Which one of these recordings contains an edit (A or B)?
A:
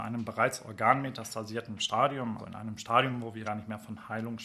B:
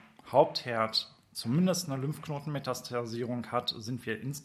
A